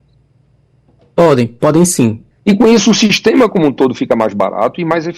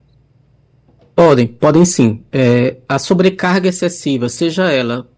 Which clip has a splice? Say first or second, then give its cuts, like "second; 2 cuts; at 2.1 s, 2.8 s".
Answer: first; 1 cut; at 2.3 s